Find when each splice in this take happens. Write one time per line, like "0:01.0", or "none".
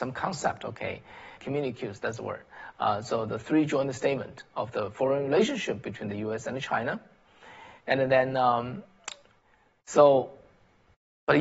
0:01.4